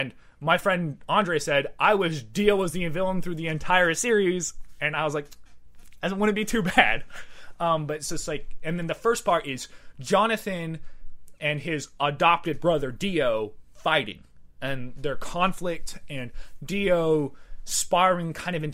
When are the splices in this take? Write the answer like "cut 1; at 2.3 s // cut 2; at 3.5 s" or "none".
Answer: none